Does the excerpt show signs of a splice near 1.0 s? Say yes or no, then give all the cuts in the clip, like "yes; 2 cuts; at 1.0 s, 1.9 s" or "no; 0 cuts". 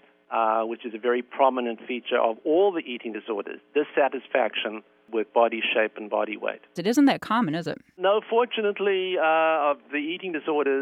no; 1 cut; at 6.8 s